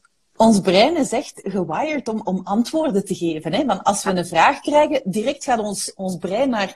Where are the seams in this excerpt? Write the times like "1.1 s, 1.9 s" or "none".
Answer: none